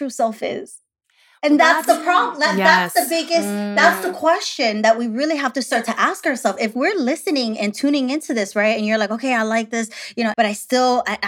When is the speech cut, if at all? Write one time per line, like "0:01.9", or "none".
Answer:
0:10.3